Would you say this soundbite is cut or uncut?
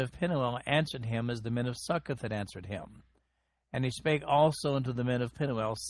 uncut